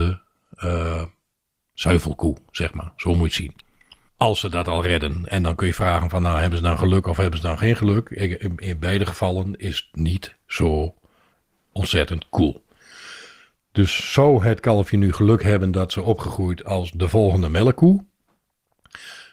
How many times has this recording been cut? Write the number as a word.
one